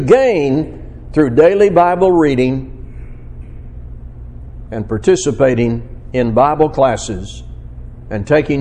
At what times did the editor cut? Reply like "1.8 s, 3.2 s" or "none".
4.7 s